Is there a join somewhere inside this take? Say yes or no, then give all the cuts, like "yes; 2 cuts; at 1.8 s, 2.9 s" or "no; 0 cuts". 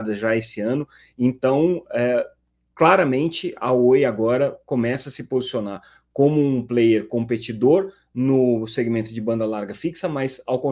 no; 0 cuts